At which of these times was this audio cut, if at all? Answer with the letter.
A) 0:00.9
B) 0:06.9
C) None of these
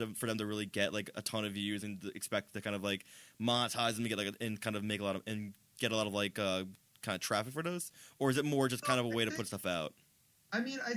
C